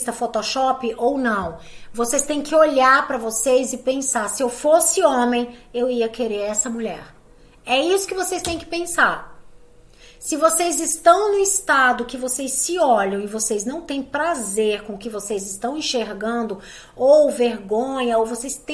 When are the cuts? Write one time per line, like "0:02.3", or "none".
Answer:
none